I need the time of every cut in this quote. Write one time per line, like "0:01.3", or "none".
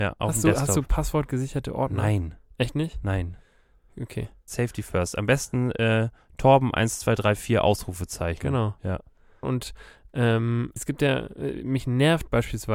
0:04.5
0:09.4
0:10.8